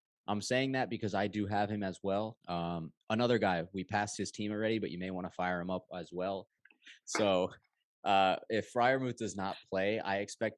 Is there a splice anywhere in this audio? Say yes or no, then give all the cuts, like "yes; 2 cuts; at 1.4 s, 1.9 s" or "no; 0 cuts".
yes; 2 cuts; at 2.4 s, 6.6 s